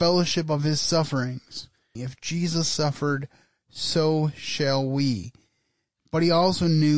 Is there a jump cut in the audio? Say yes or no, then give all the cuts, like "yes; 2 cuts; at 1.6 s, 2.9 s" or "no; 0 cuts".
yes; 1 cut; at 2.0 s